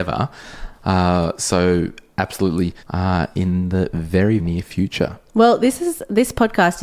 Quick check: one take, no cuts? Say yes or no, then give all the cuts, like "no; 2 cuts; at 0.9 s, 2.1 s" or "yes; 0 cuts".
no; 2 cuts; at 2.8 s, 4.4 s